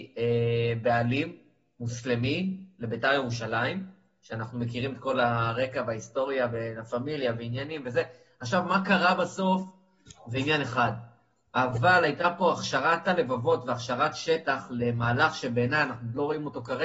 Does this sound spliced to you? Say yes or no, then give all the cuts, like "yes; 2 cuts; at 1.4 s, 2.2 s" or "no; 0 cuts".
no; 0 cuts